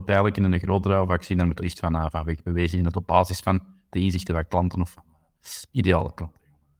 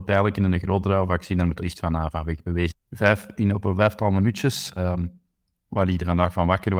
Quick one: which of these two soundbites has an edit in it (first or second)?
second